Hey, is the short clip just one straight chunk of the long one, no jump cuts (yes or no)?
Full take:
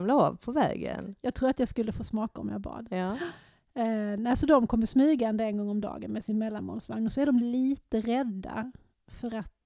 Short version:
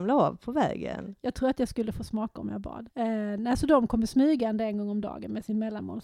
no